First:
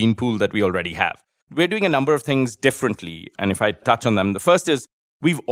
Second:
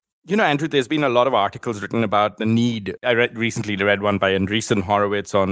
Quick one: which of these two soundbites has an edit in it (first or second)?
first